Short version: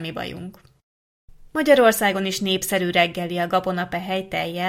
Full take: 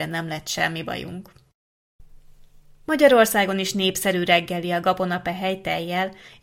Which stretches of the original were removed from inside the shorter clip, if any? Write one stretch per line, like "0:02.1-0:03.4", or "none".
0:02.2-0:02.8